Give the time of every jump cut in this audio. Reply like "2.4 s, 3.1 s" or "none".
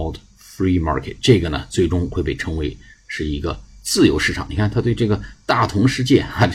none